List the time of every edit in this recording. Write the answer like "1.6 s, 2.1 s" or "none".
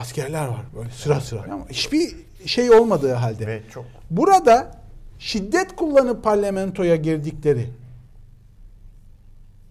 1.4 s